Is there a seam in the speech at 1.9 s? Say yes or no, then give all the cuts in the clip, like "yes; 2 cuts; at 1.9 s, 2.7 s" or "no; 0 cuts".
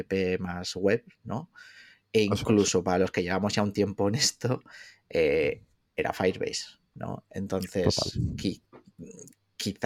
no; 0 cuts